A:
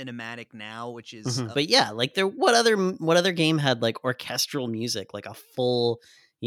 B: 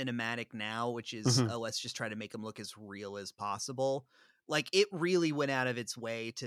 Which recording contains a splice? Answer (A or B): A